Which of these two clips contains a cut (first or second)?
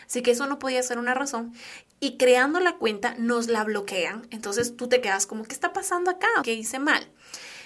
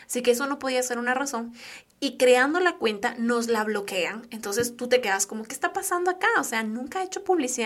first